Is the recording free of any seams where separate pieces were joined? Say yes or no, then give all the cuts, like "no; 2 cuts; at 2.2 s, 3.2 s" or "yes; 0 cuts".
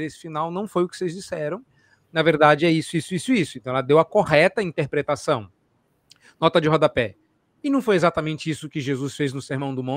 yes; 0 cuts